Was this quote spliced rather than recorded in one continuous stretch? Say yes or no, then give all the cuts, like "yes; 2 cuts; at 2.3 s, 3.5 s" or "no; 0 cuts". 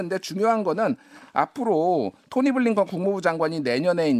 no; 0 cuts